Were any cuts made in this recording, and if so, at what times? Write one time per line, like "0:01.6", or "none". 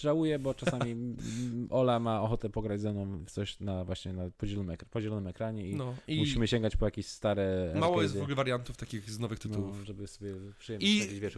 none